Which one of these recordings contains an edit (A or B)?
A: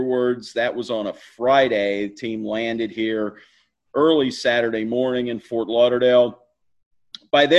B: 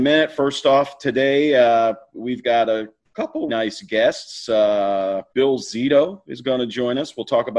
B